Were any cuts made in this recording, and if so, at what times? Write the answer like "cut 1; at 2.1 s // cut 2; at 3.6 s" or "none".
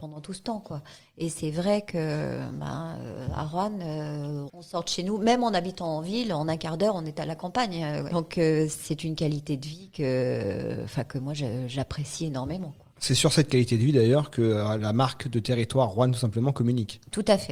cut 1; at 8.1 s

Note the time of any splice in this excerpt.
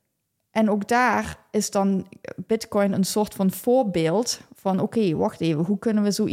none

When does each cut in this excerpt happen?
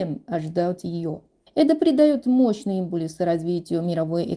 cut 1; at 1.5 s

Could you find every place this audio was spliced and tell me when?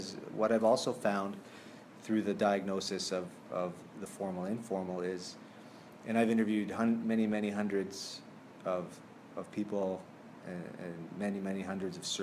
none

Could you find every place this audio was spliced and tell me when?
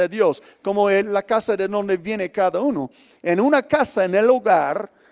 none

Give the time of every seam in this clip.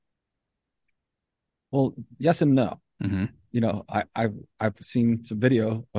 cut 1; at 3.0 s

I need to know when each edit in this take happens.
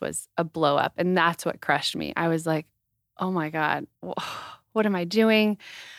cut 1; at 4.0 s

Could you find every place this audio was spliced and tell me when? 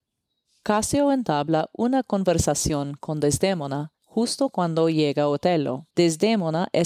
cut 1; at 5.9 s

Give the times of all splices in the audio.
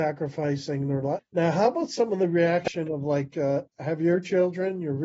cut 1; at 1.2 s

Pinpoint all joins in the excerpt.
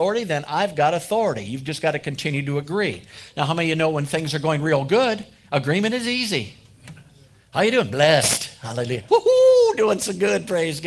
cut 1; at 9.1 s

